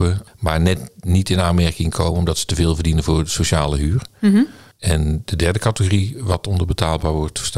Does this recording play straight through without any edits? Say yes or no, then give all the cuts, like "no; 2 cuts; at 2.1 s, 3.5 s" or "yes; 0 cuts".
yes; 0 cuts